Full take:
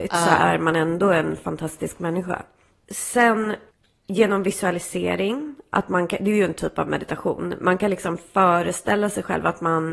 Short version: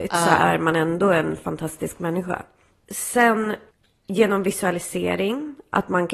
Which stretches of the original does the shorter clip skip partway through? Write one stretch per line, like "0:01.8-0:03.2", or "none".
none

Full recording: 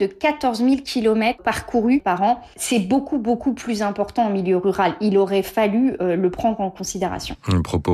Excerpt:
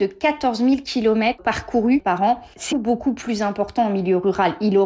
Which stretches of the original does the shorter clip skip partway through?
0:02.7-0:03.1

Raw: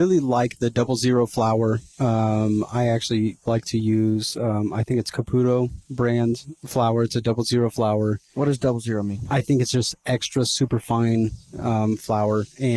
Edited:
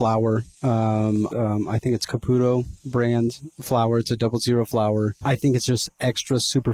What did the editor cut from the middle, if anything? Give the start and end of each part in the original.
0:02.7-0:04.4
0:08.3-0:09.3

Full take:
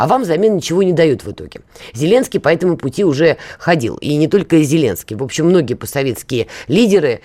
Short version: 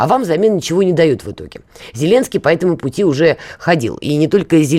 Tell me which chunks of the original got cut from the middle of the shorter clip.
none

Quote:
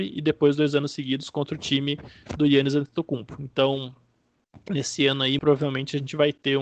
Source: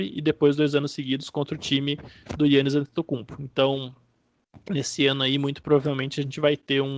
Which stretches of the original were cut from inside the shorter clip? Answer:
0:05.4-0:05.6

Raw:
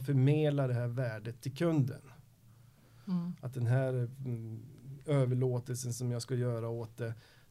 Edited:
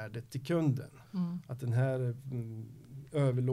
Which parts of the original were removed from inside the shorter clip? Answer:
0:02.2-0:03.0

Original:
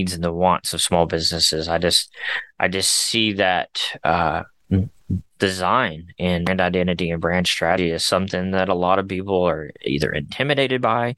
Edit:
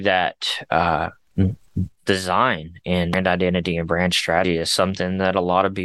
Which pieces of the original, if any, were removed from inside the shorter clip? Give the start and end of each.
none

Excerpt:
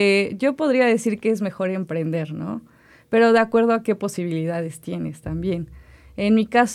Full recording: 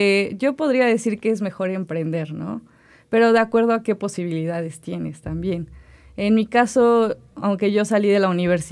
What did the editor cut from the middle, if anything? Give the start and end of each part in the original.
none

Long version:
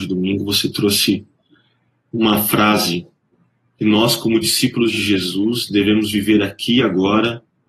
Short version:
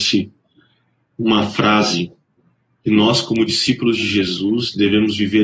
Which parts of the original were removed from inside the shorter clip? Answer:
none

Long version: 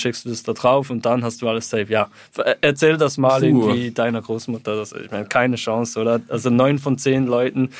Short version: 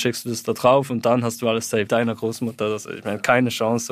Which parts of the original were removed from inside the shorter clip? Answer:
0:01.9-0:03.9

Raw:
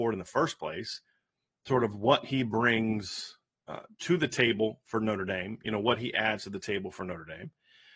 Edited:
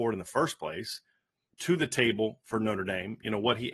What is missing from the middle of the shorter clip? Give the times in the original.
0:01.5-0:03.9

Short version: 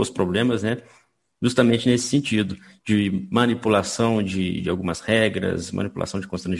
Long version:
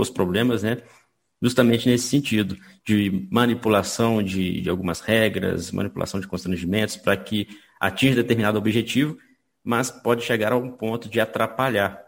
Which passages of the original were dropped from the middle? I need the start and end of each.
none

